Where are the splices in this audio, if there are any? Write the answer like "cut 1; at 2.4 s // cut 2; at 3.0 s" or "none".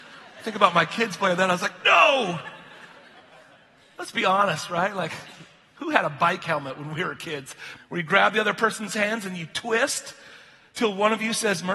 cut 1; at 7.8 s